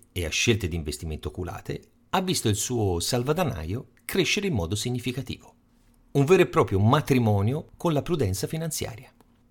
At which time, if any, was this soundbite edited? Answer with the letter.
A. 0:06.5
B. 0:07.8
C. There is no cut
C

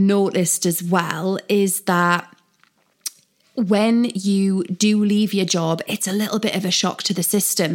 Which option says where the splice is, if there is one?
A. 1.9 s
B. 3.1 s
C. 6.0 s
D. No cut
D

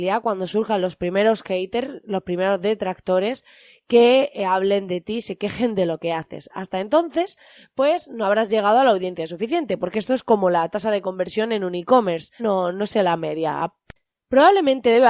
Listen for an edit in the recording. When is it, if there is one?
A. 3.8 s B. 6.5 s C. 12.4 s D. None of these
C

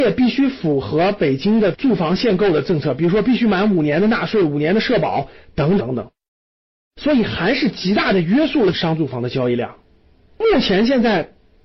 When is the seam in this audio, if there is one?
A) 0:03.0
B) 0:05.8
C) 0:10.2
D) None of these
B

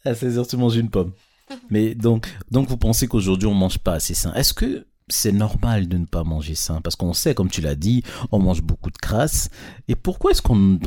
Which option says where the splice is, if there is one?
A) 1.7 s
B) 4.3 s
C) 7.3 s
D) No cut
A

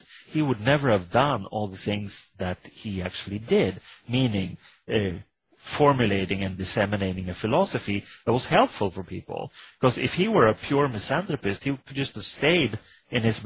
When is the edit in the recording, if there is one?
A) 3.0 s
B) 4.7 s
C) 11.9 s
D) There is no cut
D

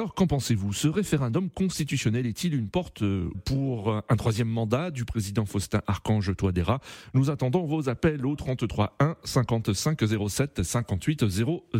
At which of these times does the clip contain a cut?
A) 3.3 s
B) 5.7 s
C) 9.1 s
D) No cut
A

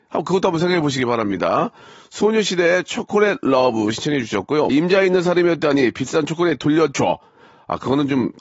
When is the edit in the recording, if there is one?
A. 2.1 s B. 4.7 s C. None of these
B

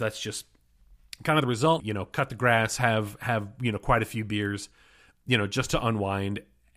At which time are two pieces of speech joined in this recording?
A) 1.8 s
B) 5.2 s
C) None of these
A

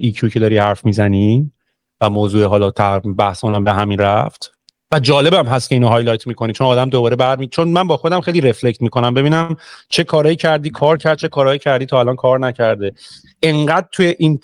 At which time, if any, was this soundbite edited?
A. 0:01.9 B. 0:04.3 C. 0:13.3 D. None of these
D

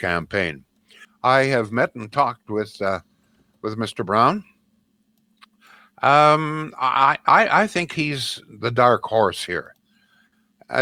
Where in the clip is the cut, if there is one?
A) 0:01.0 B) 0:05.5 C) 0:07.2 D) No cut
A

